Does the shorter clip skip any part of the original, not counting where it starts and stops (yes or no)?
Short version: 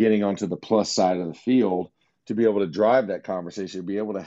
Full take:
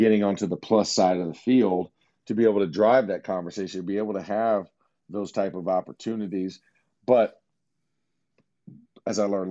no